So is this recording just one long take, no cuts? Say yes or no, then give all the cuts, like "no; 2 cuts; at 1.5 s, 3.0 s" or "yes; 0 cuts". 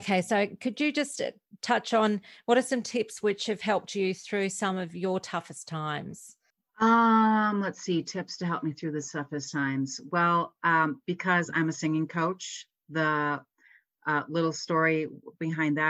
yes; 0 cuts